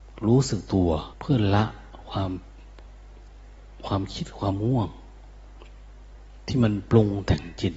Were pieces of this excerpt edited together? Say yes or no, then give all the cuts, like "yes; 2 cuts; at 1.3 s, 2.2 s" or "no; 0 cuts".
yes; 1 cut; at 1.1 s